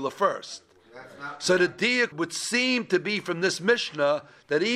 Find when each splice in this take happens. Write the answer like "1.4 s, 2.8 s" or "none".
2.1 s